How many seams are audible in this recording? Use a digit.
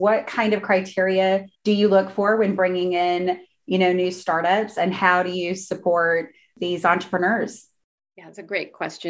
1